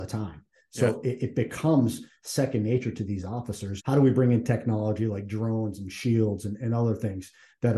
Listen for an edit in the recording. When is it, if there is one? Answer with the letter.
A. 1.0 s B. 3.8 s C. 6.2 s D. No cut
B